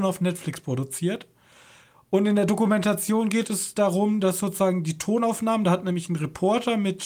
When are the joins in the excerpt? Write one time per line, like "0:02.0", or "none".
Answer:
none